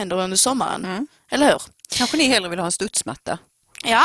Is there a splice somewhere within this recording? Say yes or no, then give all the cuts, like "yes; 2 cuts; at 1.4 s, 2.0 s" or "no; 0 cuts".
no; 0 cuts